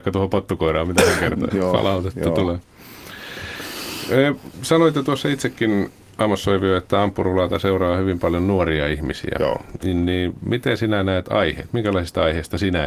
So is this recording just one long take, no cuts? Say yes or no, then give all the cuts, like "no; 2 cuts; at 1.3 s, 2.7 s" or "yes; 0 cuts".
no; 1 cut; at 1.5 s